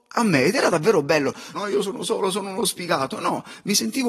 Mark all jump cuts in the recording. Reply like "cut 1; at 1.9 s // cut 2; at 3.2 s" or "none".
cut 1; at 1.5 s